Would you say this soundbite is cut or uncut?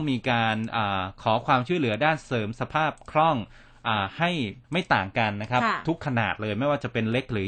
cut